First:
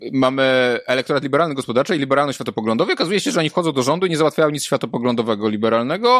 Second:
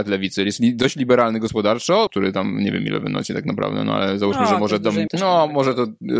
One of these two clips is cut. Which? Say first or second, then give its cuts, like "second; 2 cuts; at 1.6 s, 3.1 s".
second; 2 cuts; at 2.1 s, 5.1 s